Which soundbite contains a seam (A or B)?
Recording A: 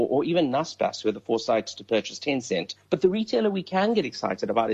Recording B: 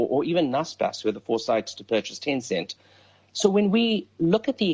A